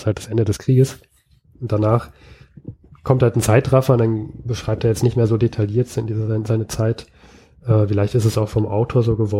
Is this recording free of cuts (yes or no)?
yes